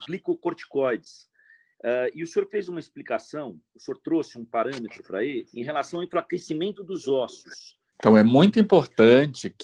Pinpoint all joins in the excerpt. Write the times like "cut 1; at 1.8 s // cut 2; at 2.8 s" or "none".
cut 1; at 5.5 s // cut 2; at 7.9 s